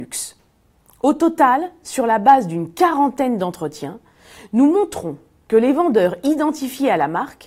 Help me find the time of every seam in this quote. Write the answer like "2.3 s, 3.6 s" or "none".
none